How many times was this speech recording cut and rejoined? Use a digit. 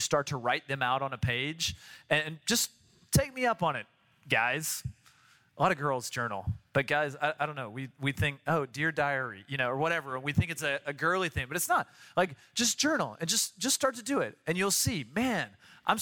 0